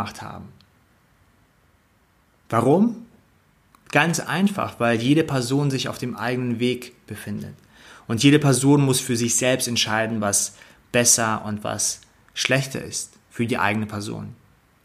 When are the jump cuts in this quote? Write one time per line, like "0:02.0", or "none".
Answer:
none